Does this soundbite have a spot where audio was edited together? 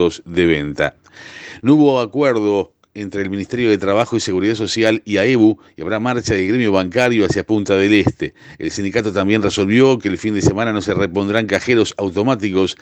no; 0 cuts

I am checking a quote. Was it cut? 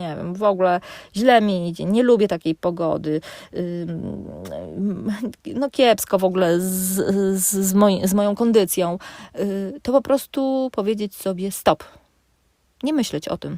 no; 0 cuts

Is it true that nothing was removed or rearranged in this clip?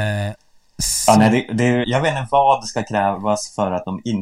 no; 1 cut; at 1.8 s

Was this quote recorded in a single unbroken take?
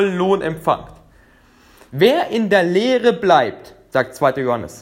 no; 1 cut; at 1.9 s

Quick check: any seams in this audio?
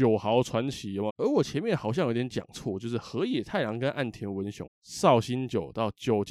yes; 2 cuts; at 1.1 s, 4.7 s

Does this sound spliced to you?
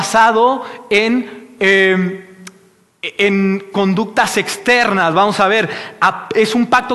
no; 0 cuts

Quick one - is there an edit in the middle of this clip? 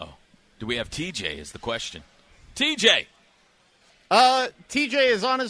no; 0 cuts

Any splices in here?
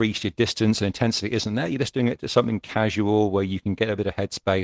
no; 0 cuts

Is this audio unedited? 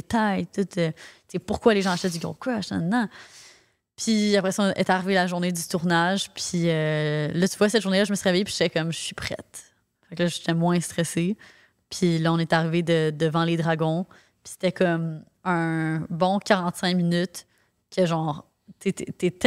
yes; 0 cuts

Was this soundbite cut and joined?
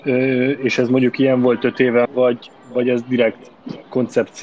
yes; 1 cut; at 2.0 s

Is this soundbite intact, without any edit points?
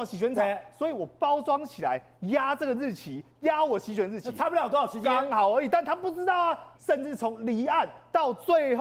no; 1 cut; at 6.7 s

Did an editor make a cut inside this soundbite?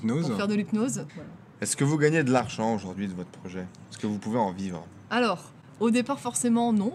yes; 2 cuts; at 1.1 s, 5.8 s

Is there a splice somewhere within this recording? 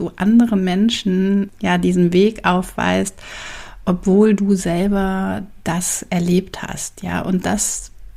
no; 0 cuts

